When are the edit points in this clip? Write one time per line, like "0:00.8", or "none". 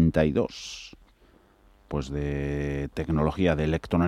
0:01.9